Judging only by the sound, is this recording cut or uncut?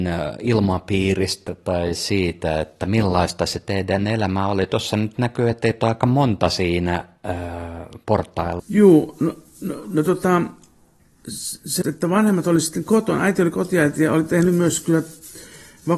cut